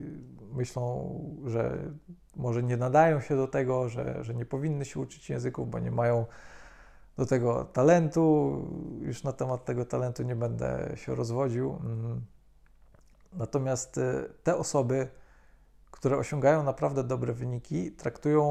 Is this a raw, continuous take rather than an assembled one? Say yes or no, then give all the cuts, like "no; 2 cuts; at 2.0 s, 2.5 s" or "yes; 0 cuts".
yes; 0 cuts